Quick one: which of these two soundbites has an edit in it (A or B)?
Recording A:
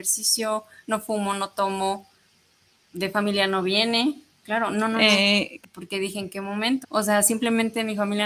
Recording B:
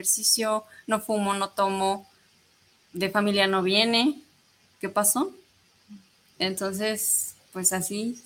A